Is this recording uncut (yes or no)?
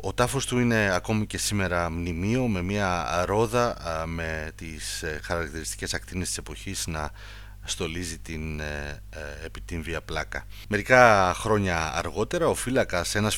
no